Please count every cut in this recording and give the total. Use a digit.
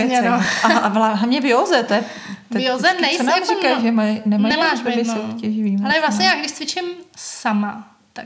0